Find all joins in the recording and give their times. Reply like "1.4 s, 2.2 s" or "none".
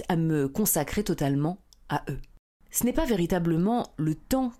none

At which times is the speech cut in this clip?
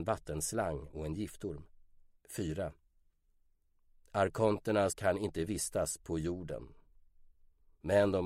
2.1 s, 4.9 s

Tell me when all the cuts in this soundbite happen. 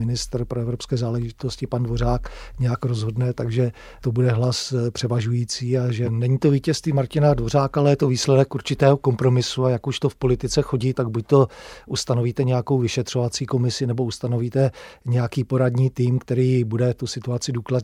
6.1 s, 10.9 s

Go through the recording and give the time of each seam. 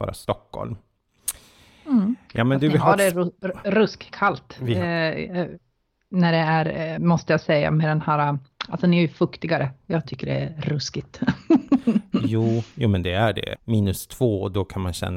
7.0 s, 13.6 s

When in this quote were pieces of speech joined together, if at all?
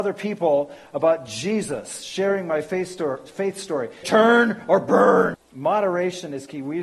4.0 s, 5.3 s

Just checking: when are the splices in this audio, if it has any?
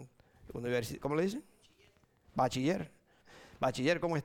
3.2 s

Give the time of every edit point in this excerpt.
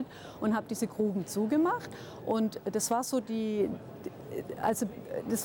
none

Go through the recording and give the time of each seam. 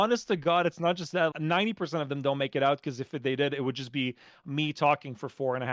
1.3 s

